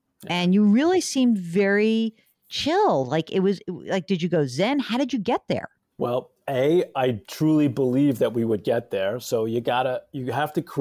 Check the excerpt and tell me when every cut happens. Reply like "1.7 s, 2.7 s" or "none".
none